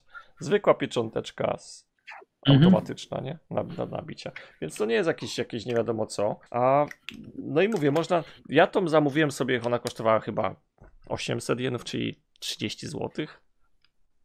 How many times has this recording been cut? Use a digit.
1